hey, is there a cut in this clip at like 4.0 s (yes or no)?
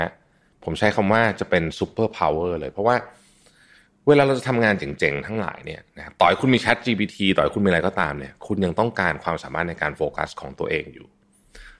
no